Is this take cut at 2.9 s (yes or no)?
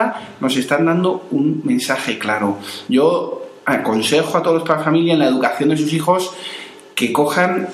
no